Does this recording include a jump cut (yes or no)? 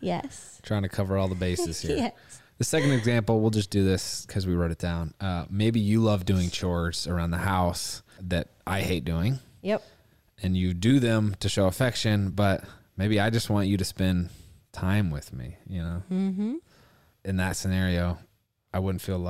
no